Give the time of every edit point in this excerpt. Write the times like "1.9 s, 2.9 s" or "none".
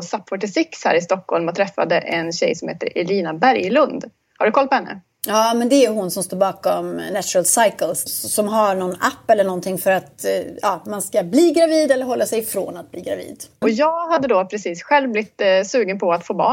8.1 s, 13.6 s